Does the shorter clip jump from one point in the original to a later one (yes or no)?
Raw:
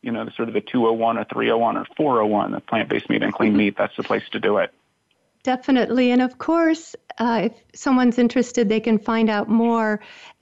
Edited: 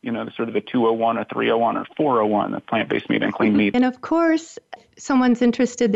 yes